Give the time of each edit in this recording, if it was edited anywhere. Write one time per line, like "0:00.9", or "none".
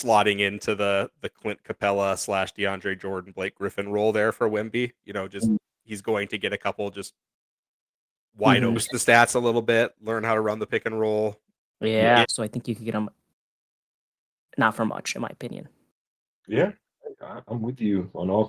0:08.8
0:12.2